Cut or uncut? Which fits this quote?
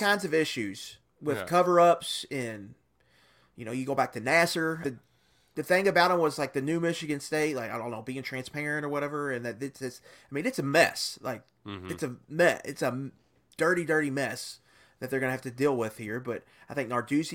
cut